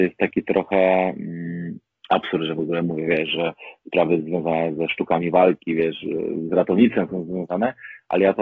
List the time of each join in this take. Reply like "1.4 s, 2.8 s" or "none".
none